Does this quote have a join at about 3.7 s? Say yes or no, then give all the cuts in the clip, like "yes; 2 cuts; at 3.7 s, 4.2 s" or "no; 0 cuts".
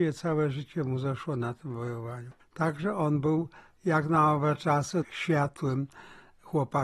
no; 2 cuts; at 2.4 s, 5.0 s